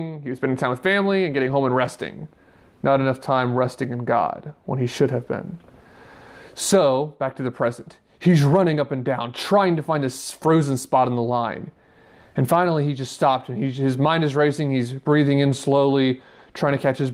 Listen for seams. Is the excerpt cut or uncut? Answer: uncut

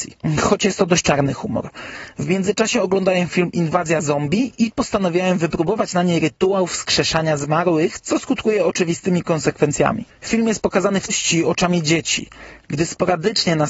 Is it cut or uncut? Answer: cut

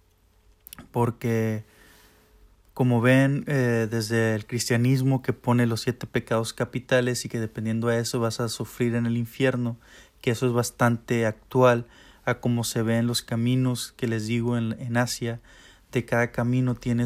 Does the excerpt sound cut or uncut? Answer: uncut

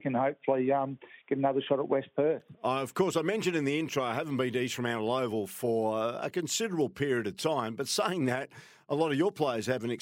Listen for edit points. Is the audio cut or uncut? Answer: uncut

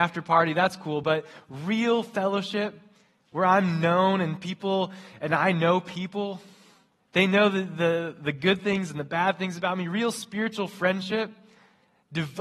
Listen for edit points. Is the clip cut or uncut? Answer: uncut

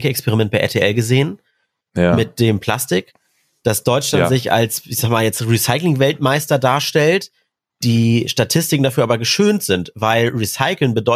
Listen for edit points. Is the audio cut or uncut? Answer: uncut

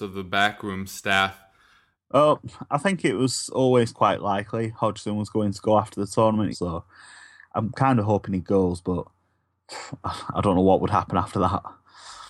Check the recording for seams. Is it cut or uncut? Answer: cut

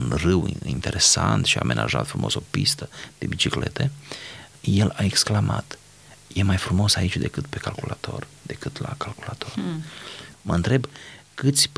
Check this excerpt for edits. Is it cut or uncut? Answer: cut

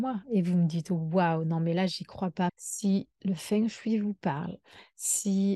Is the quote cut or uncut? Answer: cut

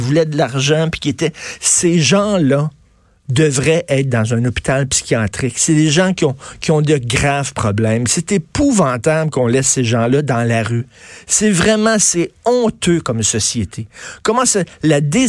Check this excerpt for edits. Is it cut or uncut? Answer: uncut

